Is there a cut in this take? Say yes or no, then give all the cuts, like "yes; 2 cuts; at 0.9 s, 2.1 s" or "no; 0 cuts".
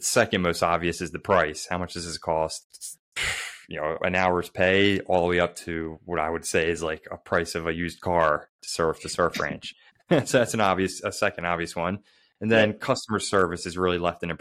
yes; 2 cuts; at 2.6 s, 4.0 s